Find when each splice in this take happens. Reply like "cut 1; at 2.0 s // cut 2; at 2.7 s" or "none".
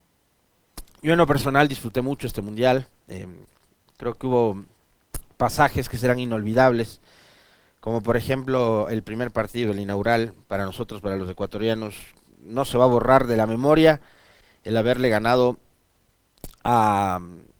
none